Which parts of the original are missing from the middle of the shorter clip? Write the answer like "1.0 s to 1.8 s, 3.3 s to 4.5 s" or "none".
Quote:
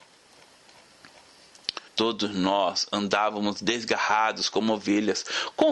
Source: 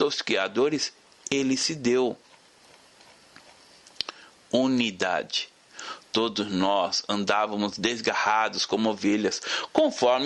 4.2 s to 6.0 s